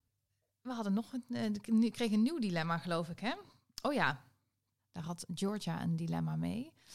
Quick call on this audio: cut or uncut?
cut